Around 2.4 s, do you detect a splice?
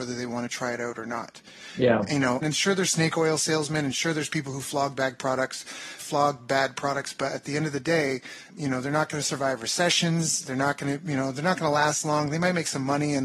yes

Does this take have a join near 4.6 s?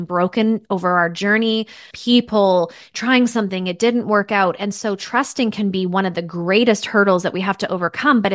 no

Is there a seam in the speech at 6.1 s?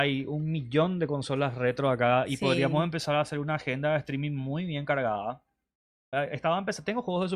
yes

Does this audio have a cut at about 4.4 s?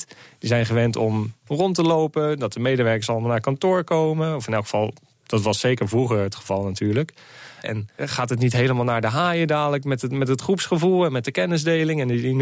no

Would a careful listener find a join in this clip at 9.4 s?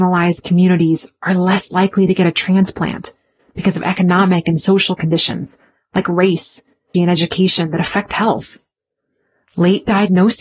no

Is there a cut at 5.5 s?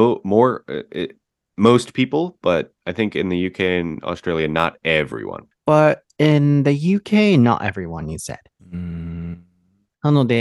yes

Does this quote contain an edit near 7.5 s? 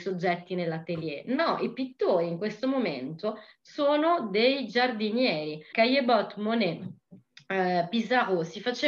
no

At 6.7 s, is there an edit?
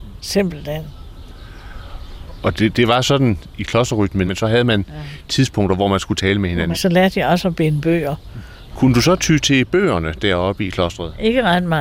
yes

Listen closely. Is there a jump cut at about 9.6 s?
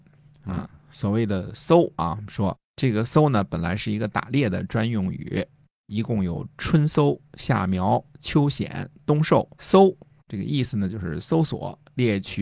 yes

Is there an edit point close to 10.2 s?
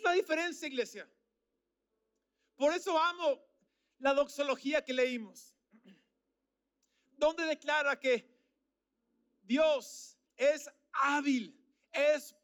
yes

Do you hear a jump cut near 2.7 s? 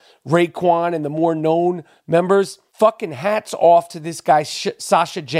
yes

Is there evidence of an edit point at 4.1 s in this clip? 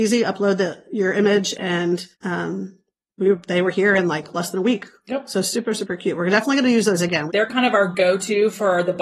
no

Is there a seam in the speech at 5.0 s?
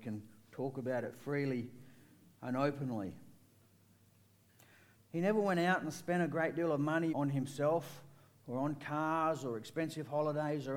yes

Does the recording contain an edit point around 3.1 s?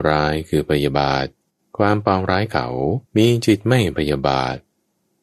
yes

